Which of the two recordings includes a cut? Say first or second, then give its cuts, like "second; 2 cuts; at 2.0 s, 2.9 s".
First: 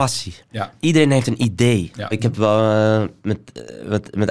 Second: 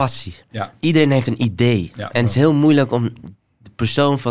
first; 1 cut; at 2.1 s